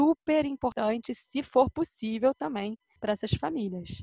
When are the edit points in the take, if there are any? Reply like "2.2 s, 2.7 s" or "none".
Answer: none